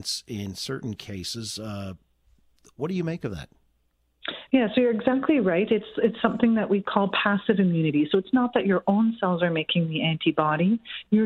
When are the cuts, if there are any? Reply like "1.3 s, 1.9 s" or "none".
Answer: none